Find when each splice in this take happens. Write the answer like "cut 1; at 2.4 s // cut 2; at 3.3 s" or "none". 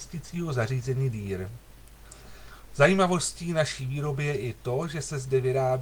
none